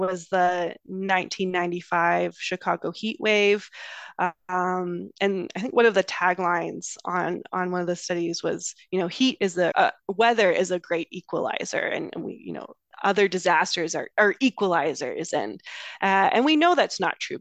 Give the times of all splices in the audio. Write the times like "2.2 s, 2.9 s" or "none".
9.7 s